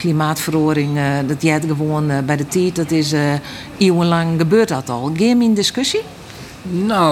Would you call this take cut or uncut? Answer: uncut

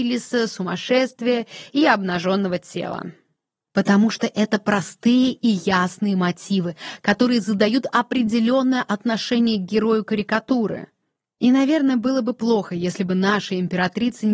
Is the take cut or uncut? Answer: uncut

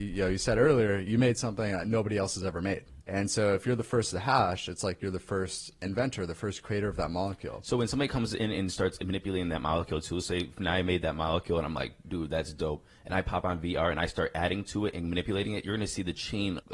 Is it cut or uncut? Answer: cut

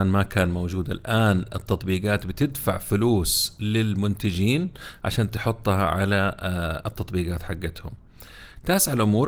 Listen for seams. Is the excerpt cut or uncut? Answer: uncut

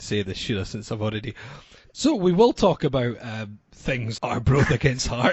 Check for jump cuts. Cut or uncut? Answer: cut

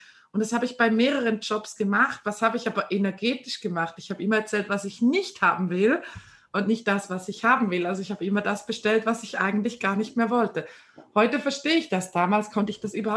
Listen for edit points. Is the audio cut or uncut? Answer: uncut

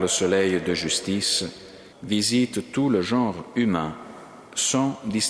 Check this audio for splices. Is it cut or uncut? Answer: cut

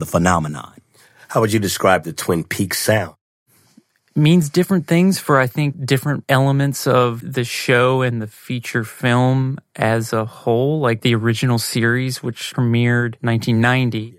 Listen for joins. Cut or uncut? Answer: uncut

